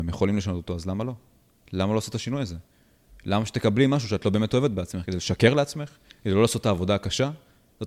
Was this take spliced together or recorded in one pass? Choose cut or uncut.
uncut